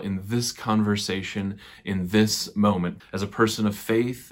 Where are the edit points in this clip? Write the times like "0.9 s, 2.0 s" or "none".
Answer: 3.0 s